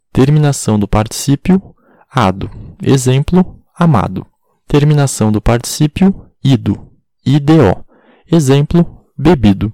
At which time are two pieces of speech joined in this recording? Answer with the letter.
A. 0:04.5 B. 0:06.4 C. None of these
A